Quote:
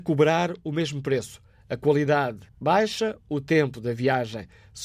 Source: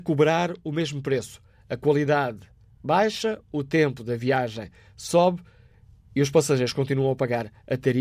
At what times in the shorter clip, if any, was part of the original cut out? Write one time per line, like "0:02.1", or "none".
0:02.5